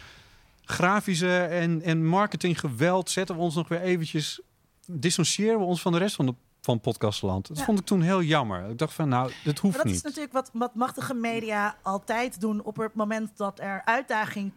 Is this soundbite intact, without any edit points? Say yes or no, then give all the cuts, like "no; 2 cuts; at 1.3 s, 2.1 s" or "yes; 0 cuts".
yes; 0 cuts